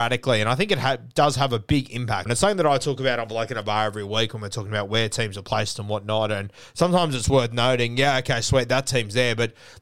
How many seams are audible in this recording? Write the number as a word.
one